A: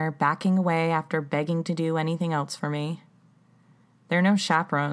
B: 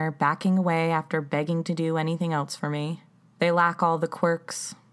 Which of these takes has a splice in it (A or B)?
B